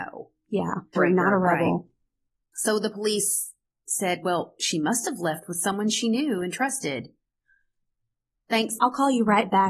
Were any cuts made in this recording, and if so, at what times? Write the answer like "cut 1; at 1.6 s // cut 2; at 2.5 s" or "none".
cut 1; at 0.9 s // cut 2; at 8.8 s